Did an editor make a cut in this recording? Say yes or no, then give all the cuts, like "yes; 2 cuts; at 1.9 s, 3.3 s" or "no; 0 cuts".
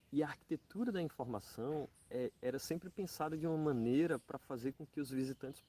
no; 0 cuts